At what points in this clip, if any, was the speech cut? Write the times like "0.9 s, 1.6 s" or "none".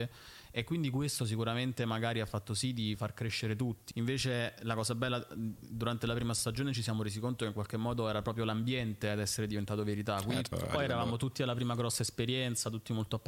3.9 s, 10.5 s